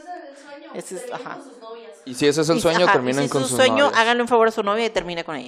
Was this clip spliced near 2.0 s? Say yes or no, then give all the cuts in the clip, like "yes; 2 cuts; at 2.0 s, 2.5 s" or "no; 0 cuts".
no; 0 cuts